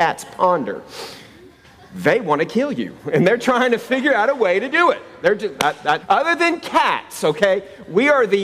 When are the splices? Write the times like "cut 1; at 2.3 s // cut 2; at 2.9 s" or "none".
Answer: cut 1; at 6.0 s